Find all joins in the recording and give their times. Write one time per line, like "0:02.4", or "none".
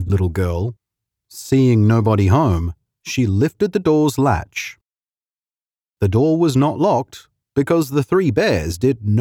none